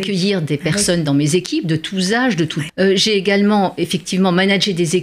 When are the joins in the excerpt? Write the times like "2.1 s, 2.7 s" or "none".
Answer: 2.7 s